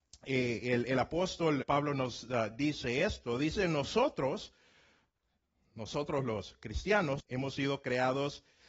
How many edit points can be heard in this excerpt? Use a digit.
2